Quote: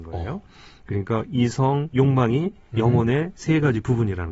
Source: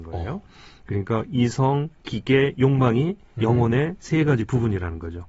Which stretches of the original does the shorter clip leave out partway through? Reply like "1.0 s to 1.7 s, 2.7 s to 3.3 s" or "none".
1.9 s to 2.5 s